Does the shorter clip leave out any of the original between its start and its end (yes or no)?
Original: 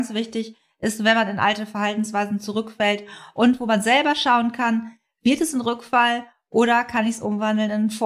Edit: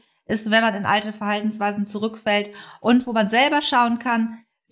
no